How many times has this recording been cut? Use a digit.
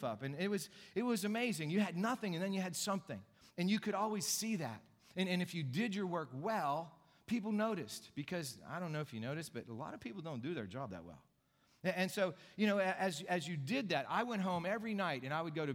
0